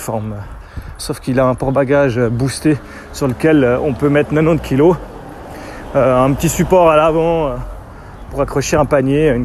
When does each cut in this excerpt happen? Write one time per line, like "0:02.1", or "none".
0:01.0